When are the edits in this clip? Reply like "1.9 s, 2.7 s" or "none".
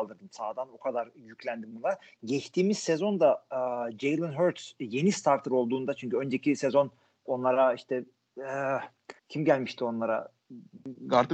7.3 s, 9.2 s